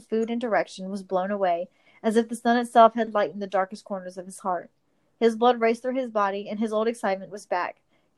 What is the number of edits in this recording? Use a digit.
0